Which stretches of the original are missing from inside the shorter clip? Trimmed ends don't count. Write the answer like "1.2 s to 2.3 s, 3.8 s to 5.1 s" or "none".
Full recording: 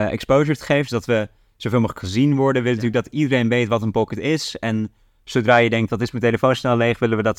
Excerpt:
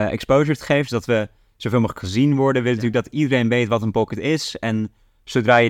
none